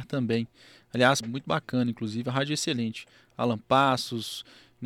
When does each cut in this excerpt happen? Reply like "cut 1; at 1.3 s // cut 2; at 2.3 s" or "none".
cut 1; at 1.2 s